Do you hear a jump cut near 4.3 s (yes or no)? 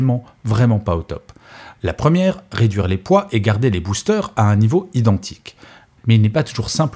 no